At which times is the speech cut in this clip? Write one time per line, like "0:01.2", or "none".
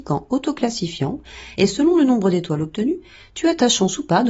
none